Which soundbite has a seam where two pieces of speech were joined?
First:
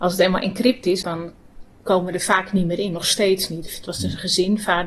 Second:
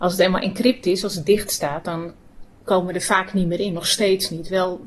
first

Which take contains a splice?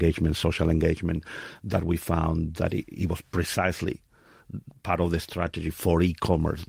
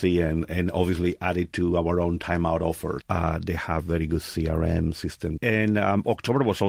second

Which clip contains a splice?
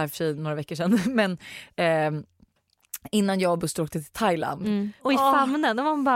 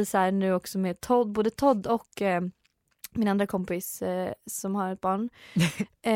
first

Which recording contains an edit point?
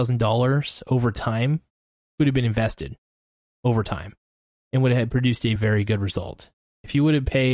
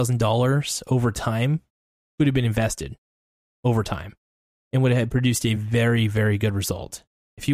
first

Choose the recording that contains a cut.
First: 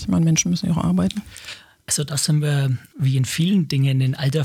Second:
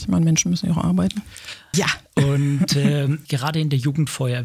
second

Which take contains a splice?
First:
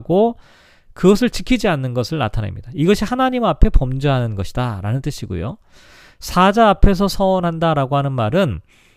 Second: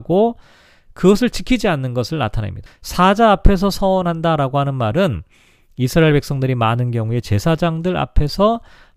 second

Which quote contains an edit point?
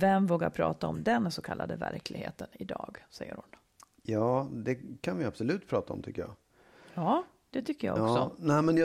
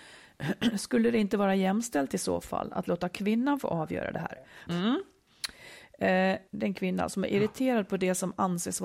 second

